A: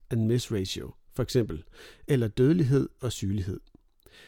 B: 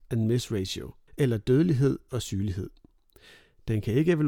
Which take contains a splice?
B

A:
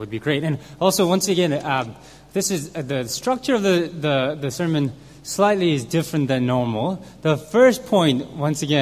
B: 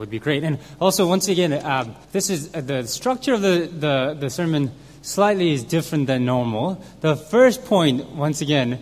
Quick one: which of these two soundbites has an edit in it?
B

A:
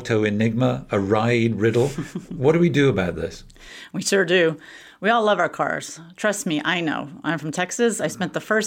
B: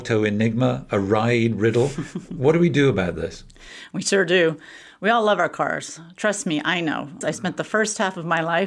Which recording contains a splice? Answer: B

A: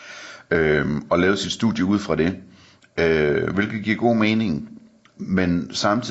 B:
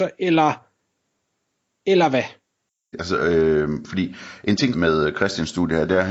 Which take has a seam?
B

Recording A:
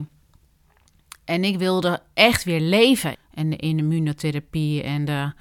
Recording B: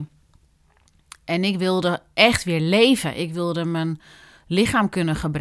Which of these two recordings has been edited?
A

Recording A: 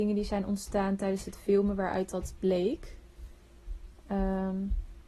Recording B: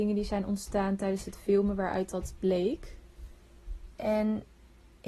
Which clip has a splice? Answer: B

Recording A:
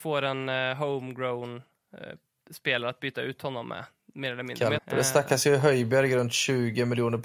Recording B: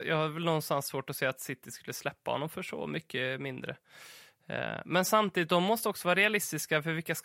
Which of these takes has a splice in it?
A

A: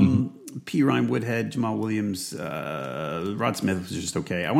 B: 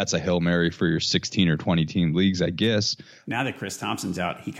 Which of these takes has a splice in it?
B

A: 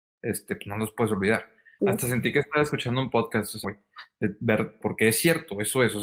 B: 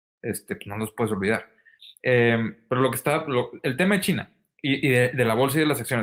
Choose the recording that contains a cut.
A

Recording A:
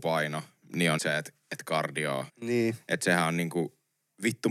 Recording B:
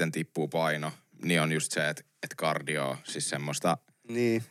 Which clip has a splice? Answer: A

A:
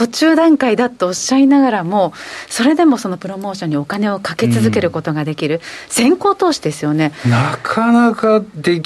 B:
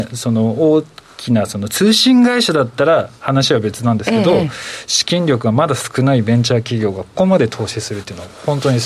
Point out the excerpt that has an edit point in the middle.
B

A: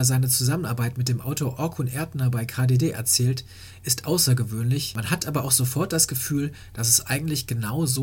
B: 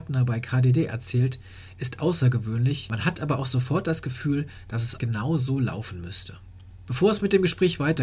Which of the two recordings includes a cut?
B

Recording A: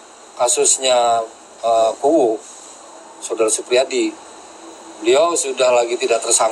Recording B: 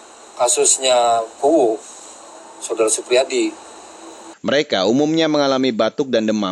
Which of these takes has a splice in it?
B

